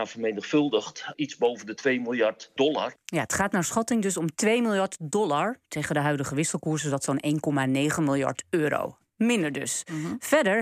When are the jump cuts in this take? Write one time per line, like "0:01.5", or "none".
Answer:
0:01.1